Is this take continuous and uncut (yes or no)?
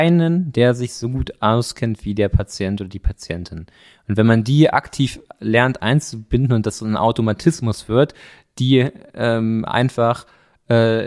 yes